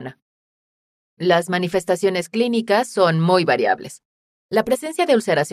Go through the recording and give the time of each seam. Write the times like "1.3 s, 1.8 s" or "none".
none